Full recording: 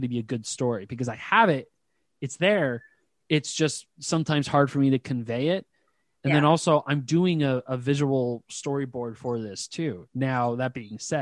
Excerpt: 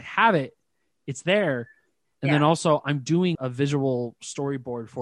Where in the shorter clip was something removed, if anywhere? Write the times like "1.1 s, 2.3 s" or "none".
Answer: 2.0 s, 3.4 s